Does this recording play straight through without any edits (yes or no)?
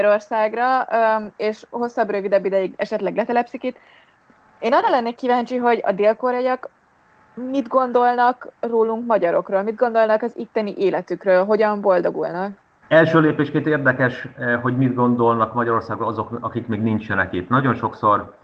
yes